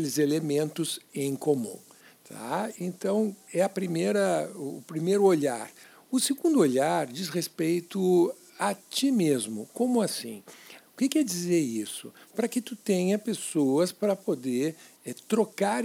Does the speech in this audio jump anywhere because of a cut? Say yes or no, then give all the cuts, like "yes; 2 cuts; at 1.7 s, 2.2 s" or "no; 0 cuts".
yes; 2 cuts; at 10.8 s, 12.3 s